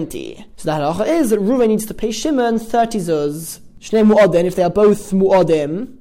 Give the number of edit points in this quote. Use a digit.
0